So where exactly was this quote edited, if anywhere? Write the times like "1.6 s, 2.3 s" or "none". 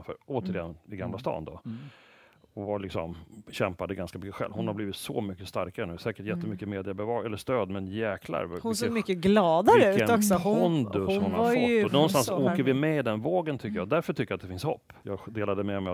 15.0 s